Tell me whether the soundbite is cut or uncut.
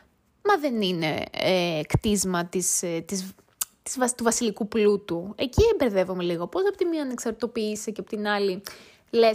uncut